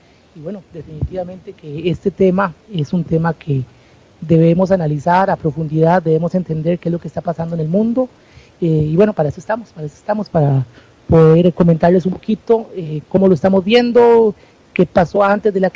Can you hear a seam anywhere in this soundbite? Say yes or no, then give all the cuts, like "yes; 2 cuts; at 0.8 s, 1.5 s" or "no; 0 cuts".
no; 0 cuts